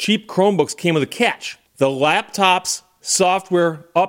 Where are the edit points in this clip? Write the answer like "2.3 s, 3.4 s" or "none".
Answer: 1.7 s